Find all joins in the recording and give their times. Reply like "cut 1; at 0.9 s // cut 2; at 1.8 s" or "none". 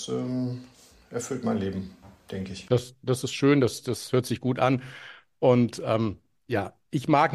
cut 1; at 2.9 s